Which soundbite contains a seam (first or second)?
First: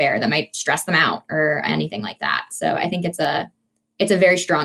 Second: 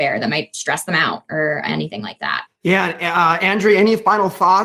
second